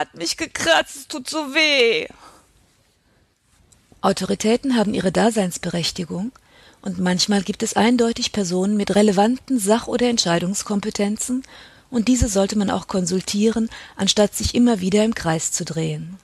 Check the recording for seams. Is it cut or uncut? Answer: uncut